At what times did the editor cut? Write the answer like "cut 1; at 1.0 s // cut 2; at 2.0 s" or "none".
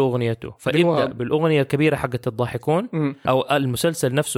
cut 1; at 3.2 s